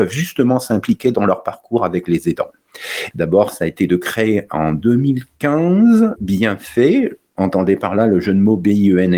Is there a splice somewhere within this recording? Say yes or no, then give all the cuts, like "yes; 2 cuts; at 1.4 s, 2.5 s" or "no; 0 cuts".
yes; 2 cuts; at 3.1 s, 6.2 s